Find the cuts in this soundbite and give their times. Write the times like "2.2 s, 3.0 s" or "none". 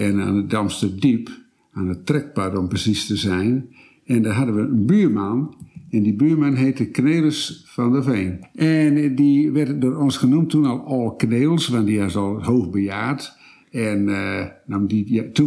none